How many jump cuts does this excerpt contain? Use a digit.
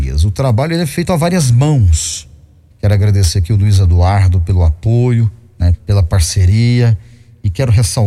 2